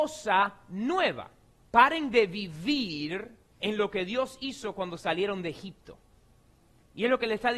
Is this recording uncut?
no; 2 cuts; at 1.6 s, 3.5 s

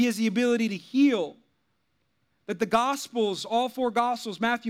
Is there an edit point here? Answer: no; 0 cuts

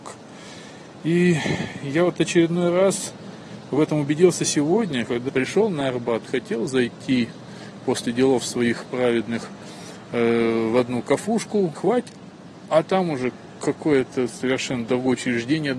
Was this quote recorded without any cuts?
no; 2 cuts; at 5.3 s, 11.7 s

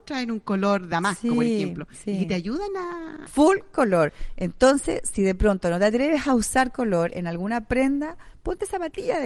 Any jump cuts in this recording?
yes; 1 cut; at 3.3 s

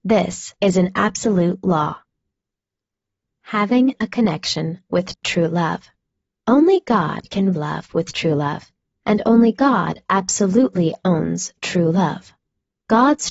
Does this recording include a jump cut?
yes; 2 cuts; at 6.4 s, 7.5 s

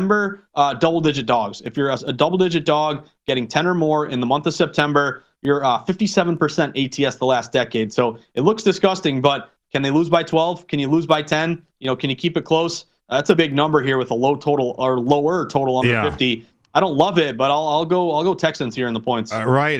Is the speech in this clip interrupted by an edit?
yes; 1 cut; at 13.3 s

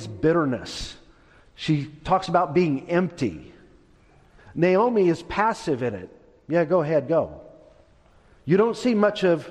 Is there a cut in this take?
yes; 1 cut; at 4.4 s

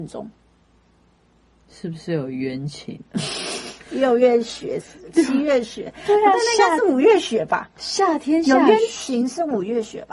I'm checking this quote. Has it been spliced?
no; 0 cuts

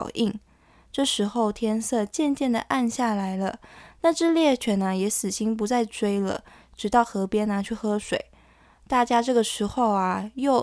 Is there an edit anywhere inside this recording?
no; 0 cuts

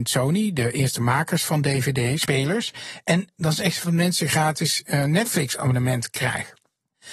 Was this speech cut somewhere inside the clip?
yes; 1 cut; at 3.8 s

